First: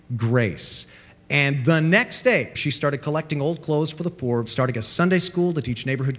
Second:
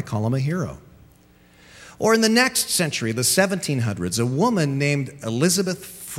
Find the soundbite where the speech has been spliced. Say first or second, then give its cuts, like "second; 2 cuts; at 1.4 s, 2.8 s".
first; 2 cuts; at 2.5 s, 4.4 s